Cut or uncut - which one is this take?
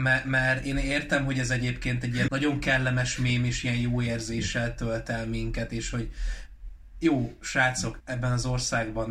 cut